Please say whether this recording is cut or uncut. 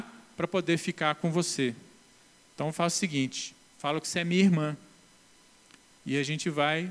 uncut